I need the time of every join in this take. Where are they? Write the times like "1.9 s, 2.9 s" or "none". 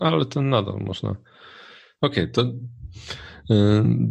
2.0 s